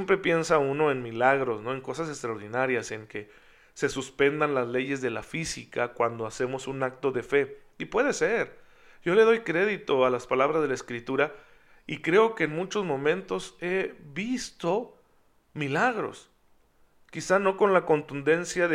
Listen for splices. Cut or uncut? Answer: uncut